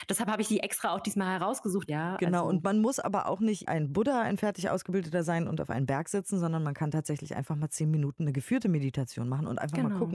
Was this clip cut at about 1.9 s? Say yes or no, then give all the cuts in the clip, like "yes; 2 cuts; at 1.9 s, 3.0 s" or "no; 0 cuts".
yes; 1 cut; at 1.9 s